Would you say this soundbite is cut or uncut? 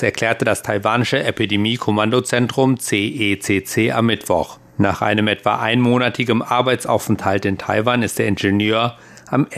cut